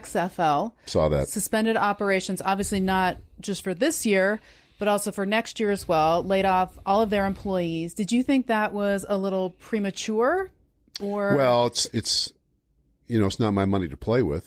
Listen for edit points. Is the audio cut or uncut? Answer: uncut